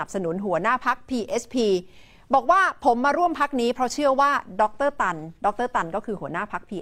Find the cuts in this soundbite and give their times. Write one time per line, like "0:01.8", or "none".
none